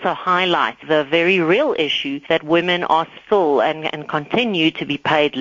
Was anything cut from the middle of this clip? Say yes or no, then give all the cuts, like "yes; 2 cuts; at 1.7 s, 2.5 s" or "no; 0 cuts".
no; 0 cuts